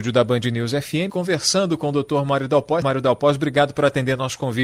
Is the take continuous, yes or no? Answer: no